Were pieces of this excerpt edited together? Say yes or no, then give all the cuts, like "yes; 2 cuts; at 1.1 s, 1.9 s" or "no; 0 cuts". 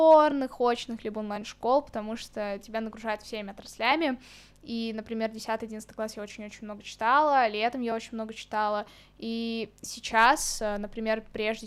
no; 0 cuts